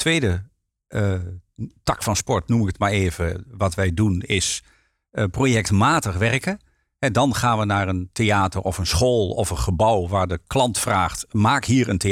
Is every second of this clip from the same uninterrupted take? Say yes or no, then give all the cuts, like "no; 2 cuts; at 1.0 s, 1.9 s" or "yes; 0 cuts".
yes; 0 cuts